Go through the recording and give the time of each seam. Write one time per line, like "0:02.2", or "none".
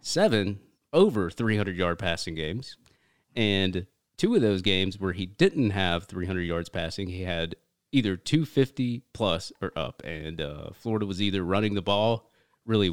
none